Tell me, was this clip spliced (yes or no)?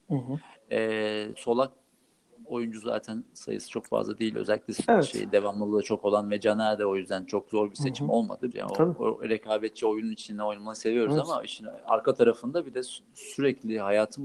yes